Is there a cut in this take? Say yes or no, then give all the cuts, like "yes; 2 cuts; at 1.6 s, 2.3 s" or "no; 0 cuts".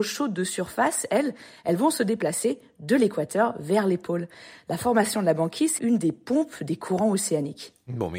yes; 1 cut; at 5.8 s